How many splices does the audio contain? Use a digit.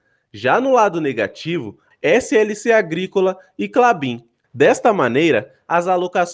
2